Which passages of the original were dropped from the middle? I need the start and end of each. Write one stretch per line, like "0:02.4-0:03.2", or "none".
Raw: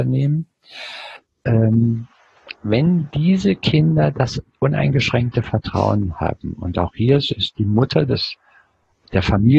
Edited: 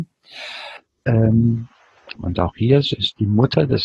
0:02.5-0:06.5